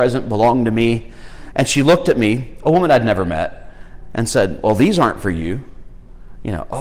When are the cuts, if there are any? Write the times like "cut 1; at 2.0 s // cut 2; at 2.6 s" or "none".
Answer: cut 1; at 1.5 s